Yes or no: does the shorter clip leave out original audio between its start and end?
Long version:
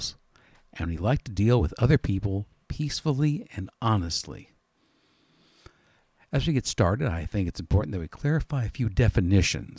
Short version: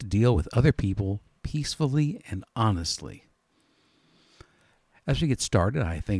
no